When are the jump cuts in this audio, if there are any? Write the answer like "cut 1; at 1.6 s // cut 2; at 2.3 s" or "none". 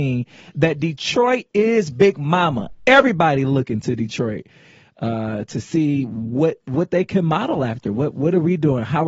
none